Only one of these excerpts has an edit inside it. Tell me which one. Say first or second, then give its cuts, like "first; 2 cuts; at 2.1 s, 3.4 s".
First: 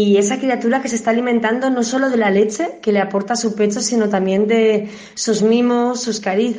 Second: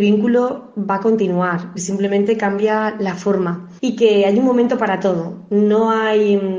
second; 2 cuts; at 1.8 s, 3.8 s